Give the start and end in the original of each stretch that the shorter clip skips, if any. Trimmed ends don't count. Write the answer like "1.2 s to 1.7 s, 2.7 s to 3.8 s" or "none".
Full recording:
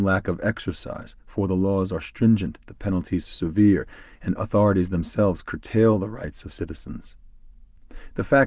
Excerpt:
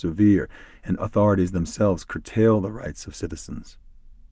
none

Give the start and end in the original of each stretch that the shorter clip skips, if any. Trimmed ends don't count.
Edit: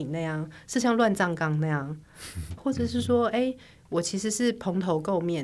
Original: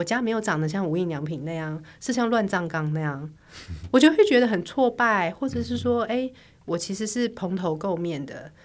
3.9 s to 5.3 s

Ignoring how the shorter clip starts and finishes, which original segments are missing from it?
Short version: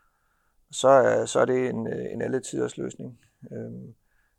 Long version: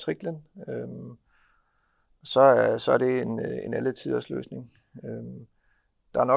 none

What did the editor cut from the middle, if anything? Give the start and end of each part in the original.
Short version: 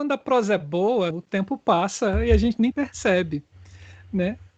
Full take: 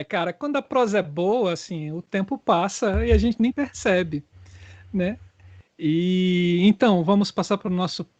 1.5 s to 1.9 s

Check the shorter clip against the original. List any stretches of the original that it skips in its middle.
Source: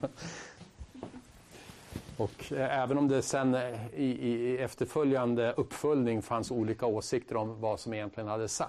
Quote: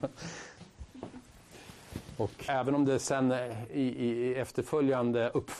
2.5 s to 2.7 s

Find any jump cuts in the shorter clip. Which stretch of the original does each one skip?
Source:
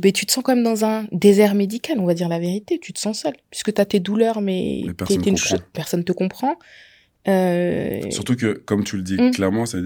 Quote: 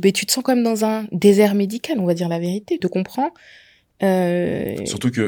2.8 s to 6.1 s

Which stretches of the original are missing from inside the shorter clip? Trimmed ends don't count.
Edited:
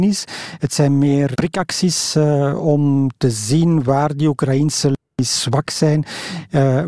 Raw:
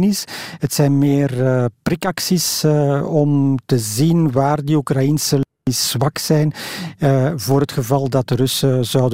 1.3 s to 1.8 s

